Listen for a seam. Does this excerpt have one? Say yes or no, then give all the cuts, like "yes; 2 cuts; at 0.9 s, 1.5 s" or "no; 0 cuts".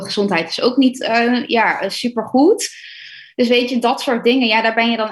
no; 0 cuts